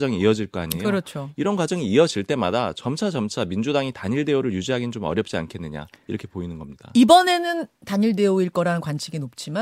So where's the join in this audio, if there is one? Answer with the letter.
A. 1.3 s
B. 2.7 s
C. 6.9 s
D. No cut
D